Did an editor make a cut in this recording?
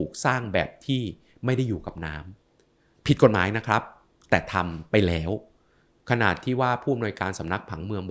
yes; 1 cut; at 2.4 s

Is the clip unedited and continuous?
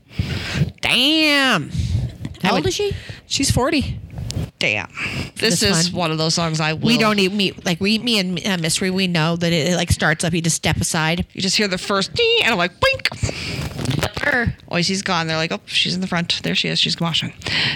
no; 1 cut; at 5.4 s

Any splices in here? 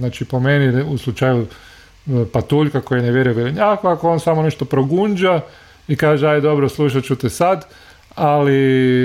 no; 0 cuts

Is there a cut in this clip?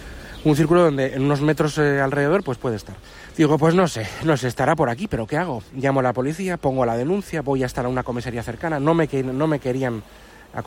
yes; 1 cut; at 3.3 s

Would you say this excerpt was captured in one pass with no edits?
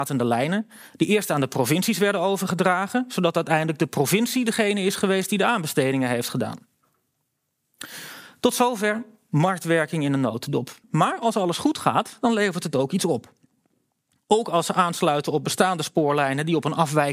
no; 2 cuts; at 10.8 s, 14.2 s

